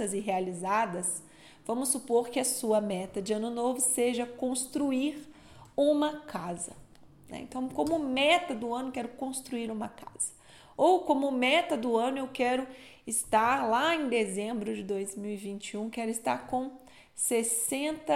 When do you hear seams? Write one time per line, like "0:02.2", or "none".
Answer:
none